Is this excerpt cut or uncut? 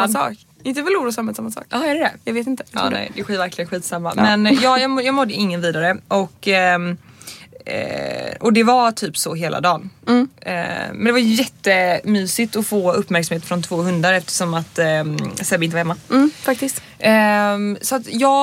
uncut